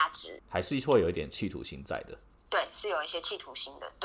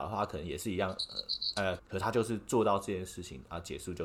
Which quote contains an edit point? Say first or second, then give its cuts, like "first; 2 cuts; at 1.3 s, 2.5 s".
second; 1 cut; at 1.8 s